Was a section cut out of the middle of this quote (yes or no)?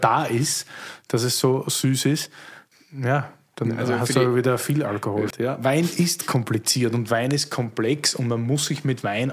yes